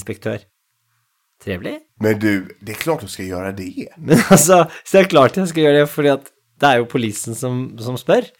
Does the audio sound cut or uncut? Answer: cut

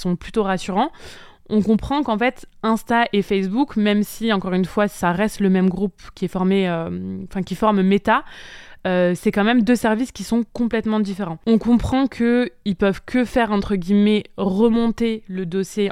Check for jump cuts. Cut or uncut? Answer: uncut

